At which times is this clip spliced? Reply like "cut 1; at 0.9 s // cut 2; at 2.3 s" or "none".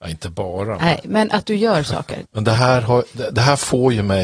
cut 1; at 2.2 s